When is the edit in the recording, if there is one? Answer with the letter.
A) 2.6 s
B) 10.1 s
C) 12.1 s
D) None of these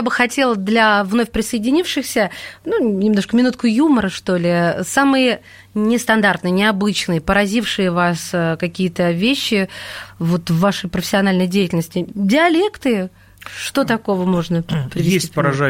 D